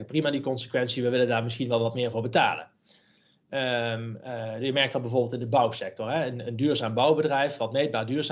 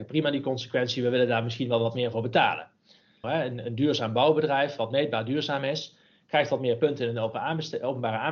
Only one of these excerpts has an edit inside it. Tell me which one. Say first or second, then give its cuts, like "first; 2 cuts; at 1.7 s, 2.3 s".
second; 1 cut; at 3.2 s